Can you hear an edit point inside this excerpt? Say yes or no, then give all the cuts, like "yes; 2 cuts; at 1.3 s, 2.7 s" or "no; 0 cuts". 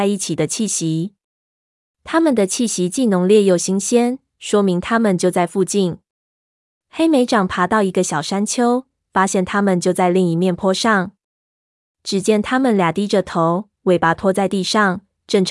no; 0 cuts